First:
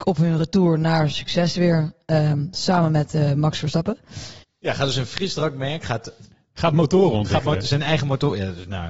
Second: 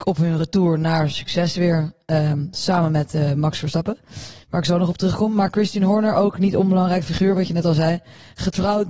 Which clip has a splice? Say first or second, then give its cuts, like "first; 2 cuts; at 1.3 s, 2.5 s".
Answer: first; 1 cut; at 4.4 s